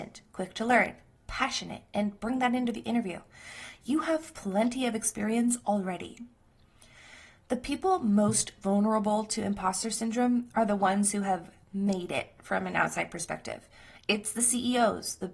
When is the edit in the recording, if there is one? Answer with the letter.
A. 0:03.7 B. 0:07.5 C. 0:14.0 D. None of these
D